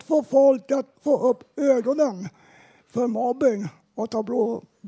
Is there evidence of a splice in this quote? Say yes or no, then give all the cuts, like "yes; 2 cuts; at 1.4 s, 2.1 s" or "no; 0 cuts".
yes; 1 cut; at 0.9 s